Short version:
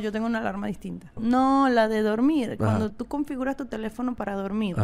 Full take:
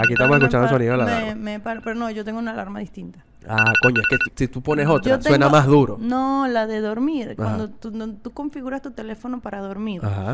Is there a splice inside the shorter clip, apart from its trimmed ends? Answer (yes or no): yes